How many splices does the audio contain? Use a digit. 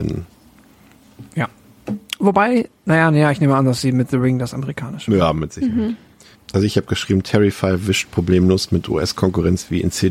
1